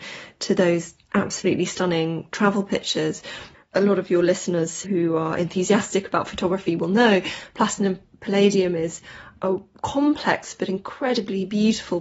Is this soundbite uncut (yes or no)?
no